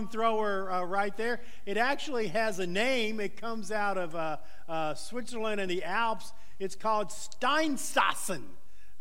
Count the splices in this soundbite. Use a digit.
0